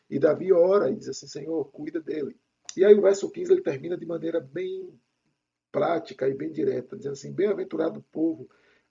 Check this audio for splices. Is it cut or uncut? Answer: uncut